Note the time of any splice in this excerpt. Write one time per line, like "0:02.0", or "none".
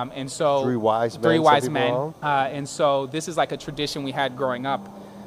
0:02.1